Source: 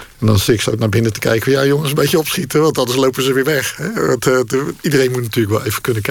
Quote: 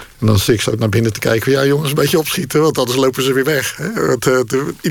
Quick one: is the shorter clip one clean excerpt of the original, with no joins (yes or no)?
yes